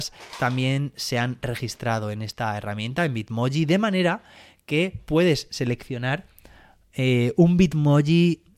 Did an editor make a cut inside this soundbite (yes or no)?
no